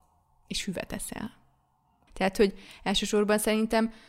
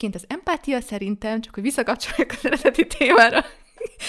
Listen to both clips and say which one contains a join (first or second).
first